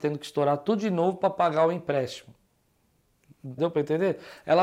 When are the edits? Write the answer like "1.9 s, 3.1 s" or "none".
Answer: 3.6 s